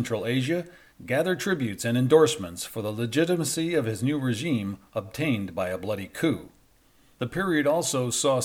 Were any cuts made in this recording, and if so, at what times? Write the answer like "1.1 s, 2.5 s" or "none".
0.9 s, 7.1 s